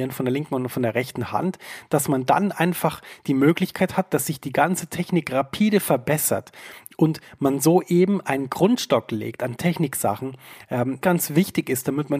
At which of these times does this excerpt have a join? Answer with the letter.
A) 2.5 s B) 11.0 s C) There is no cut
B